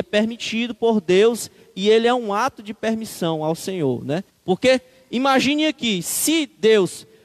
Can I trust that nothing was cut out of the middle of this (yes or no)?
no